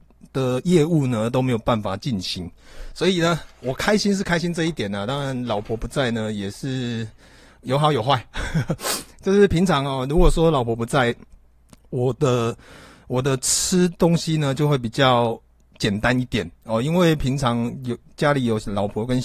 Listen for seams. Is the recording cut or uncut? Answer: uncut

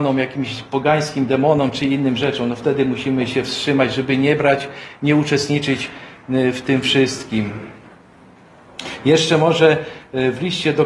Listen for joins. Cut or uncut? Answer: uncut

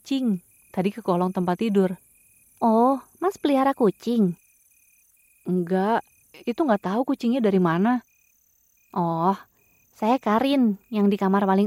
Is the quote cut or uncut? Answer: uncut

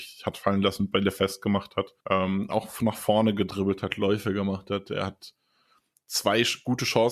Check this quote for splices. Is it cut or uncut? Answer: cut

